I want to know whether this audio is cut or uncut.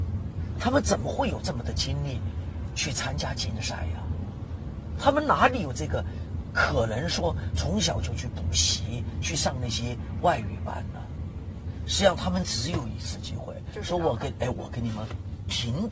uncut